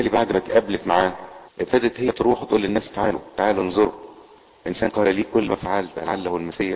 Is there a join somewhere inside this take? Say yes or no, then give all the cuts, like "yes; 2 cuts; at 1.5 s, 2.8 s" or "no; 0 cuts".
yes; 1 cut; at 1.5 s